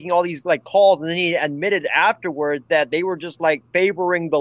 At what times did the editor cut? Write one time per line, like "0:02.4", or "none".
none